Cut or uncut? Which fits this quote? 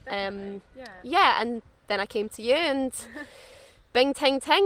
uncut